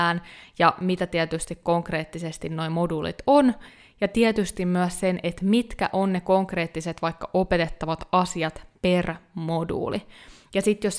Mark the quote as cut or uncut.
uncut